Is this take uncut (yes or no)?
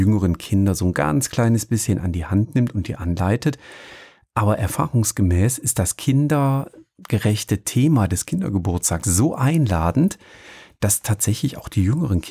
yes